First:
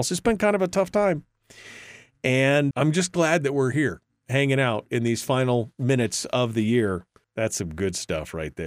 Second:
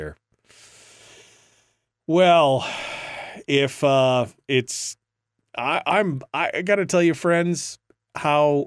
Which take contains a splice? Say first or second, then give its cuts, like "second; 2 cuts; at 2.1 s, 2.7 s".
first; 2 cuts; at 2.7 s, 7.2 s